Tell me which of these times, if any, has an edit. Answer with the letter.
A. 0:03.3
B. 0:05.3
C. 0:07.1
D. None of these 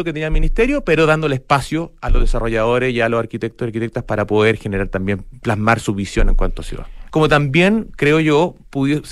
C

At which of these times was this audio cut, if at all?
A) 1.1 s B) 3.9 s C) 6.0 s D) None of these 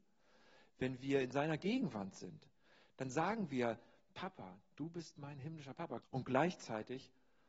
C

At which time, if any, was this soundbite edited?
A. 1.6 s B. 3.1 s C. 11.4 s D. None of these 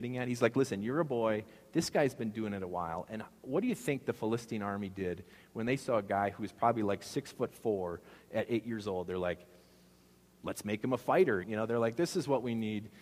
C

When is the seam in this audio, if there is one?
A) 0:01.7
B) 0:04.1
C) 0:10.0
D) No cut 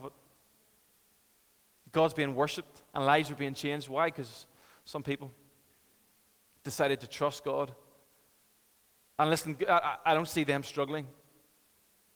C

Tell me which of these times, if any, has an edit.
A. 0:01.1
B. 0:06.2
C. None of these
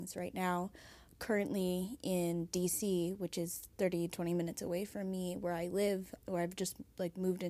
B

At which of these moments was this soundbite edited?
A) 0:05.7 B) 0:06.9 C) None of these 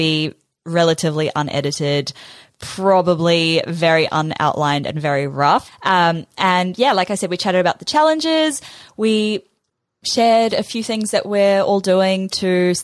A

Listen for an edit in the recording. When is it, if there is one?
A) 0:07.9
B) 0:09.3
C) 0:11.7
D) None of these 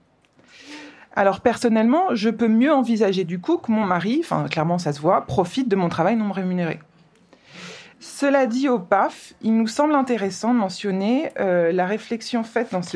A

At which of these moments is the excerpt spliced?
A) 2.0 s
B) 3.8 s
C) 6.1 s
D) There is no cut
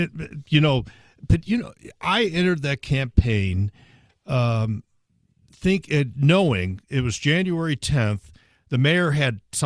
D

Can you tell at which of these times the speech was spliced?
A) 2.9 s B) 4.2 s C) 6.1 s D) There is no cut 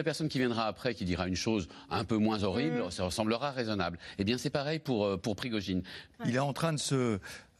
C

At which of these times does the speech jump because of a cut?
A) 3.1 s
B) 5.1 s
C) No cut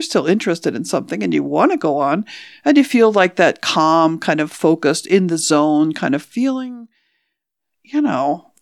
C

